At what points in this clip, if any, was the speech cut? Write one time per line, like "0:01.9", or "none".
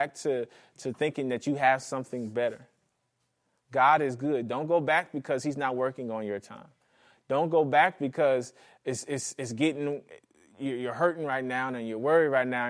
none